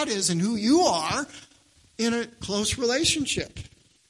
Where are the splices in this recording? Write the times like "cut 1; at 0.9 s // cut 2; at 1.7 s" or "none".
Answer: none